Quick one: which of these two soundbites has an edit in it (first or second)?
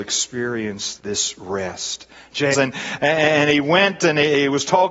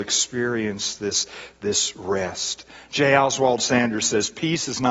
first